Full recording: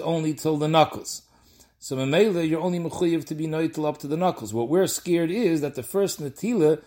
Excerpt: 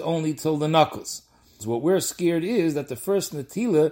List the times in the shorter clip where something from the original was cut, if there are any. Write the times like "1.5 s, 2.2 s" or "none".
1.6 s